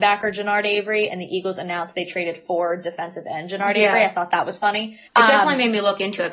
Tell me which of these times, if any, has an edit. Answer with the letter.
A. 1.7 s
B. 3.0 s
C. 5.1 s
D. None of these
C